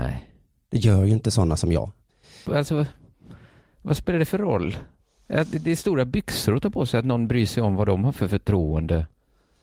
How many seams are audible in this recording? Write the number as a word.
one